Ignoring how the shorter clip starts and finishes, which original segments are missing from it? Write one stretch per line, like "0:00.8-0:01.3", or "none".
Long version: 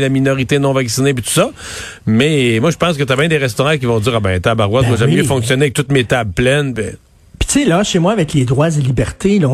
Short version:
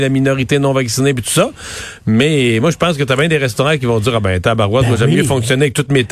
none